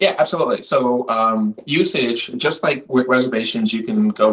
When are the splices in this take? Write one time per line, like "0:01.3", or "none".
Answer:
none